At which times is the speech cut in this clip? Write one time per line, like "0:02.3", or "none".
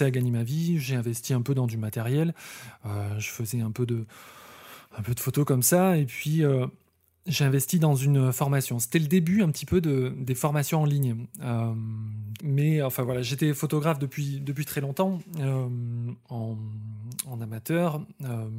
0:12.4